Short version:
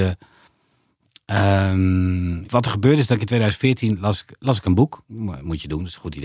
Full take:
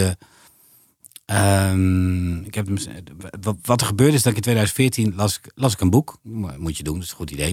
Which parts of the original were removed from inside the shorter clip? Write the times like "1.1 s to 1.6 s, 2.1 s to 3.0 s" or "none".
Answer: 2.4 s to 3.6 s